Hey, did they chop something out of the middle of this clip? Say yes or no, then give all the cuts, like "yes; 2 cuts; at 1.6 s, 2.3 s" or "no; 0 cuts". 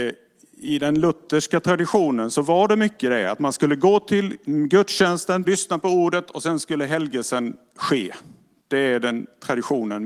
yes; 1 cut; at 5.4 s